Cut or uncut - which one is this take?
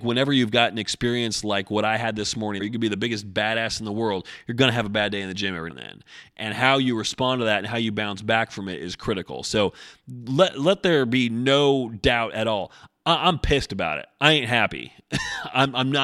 cut